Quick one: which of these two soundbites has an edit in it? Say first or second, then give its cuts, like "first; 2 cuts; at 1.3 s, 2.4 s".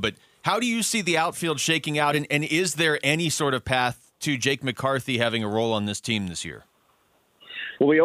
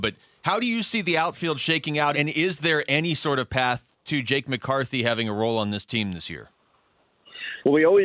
second; 1 cut; at 2.1 s